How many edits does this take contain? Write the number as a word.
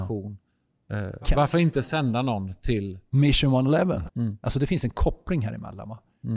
one